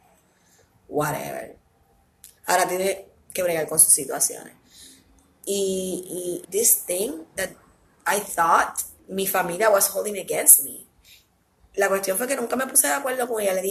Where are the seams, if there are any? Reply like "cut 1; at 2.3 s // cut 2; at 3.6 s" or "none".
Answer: cut 1; at 6.4 s // cut 2; at 9.0 s